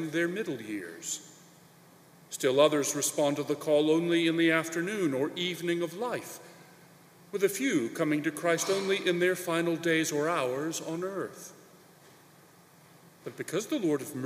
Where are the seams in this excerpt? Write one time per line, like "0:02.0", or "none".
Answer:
none